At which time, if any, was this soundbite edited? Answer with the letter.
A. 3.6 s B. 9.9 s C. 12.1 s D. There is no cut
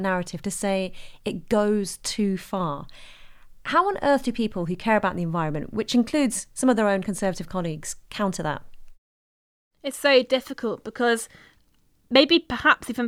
D